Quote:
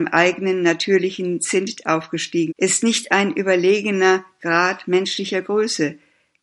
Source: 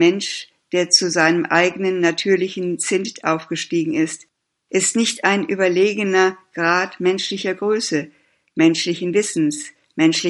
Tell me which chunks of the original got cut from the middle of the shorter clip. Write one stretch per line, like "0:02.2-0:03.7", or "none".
0:03.9-0:04.6